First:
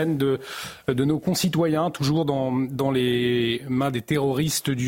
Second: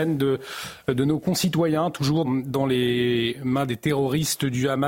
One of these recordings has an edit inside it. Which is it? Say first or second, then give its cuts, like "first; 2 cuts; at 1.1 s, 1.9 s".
second; 1 cut; at 2.2 s